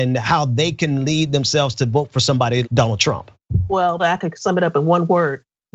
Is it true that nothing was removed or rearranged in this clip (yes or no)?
no